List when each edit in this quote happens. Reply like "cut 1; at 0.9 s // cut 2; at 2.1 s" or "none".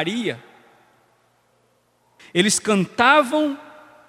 cut 1; at 2.2 s